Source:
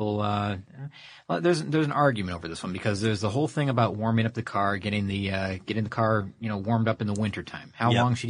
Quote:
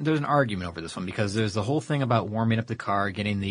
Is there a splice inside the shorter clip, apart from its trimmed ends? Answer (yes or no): no